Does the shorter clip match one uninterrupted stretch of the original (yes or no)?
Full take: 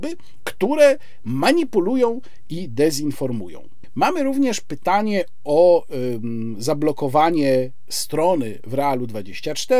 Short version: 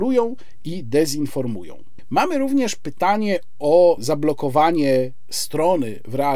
no